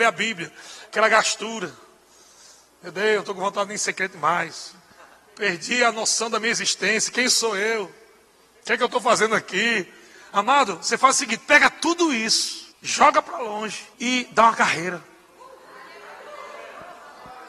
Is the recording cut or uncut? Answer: cut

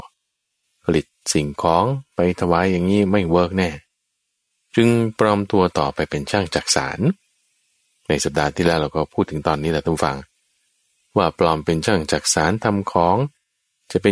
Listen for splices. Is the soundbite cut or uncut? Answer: uncut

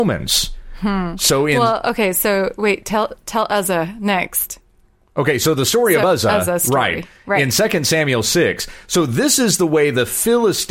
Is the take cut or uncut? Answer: uncut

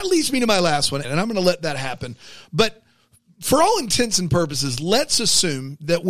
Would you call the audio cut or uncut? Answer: cut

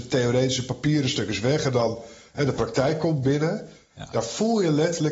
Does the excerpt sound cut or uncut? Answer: uncut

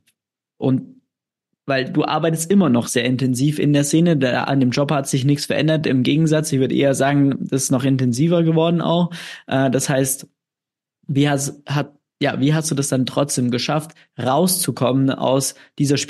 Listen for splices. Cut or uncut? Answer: uncut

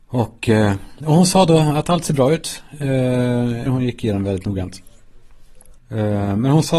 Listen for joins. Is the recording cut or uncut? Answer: cut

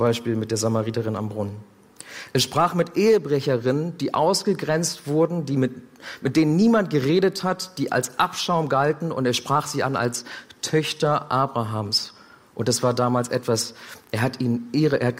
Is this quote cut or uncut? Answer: uncut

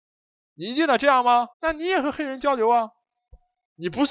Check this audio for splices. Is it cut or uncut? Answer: cut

